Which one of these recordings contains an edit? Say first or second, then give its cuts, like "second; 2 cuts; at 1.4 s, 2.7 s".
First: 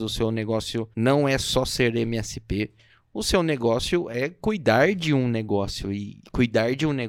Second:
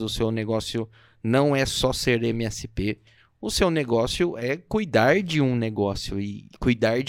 first; 1 cut; at 0.9 s